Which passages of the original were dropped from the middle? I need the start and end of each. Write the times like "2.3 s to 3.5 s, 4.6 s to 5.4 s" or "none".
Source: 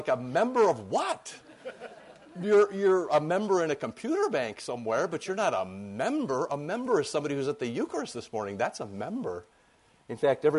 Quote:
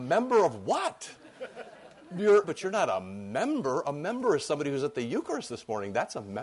2.7 s to 5.1 s